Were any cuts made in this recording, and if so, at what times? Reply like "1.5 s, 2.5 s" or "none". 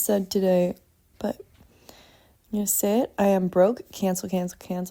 1.1 s